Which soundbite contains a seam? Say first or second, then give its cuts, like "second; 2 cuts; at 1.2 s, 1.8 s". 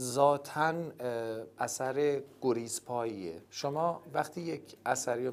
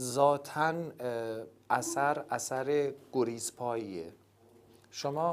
first; 2 cuts; at 1.6 s, 3.5 s